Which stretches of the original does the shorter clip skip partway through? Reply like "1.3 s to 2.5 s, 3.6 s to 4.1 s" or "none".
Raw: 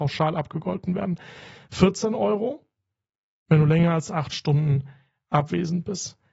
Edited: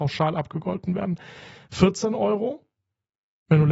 none